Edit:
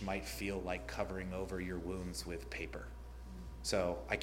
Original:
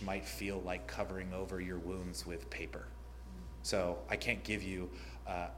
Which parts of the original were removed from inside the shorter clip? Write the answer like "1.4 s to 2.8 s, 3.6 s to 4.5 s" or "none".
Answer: none